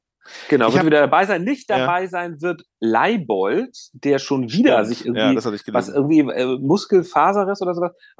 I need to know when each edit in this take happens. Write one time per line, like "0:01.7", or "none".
none